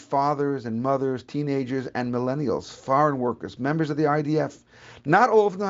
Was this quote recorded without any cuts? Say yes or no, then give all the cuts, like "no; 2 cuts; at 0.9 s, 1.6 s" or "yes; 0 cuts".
no; 1 cut; at 3.6 s